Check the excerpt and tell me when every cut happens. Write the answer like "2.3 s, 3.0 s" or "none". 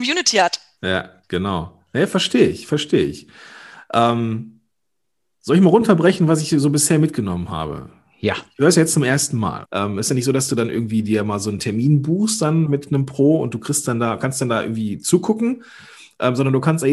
9.7 s, 12.7 s